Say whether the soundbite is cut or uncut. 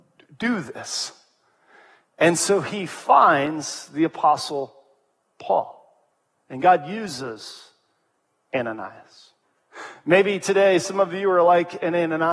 uncut